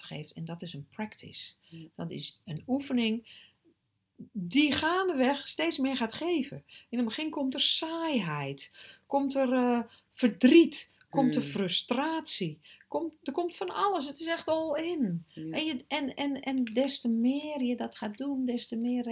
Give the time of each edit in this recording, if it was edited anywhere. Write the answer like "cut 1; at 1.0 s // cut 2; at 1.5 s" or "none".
none